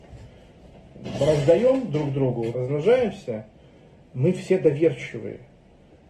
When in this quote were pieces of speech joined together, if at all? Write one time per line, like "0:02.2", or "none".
0:02.5